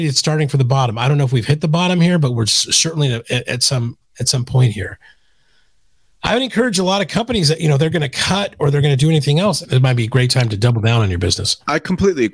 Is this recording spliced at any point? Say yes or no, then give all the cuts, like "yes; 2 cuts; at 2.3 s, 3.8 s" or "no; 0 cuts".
yes; 1 cut; at 9.6 s